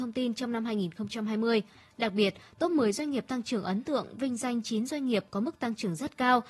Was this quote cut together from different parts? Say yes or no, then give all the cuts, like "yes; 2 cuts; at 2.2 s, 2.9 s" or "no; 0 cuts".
no; 0 cuts